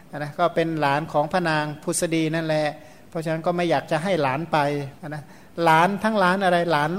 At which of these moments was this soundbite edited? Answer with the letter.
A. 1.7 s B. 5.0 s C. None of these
B